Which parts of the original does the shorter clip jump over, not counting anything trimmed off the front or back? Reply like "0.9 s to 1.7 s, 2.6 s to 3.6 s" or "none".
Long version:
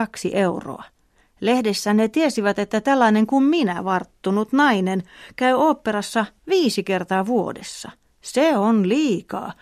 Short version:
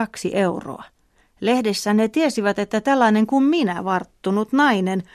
none